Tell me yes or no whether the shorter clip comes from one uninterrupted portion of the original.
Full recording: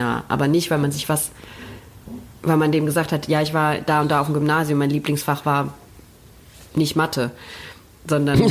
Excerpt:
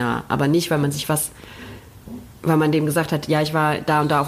yes